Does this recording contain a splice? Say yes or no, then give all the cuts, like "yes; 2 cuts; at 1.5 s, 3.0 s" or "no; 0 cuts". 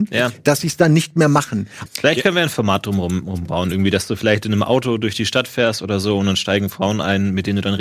yes; 1 cut; at 1.9 s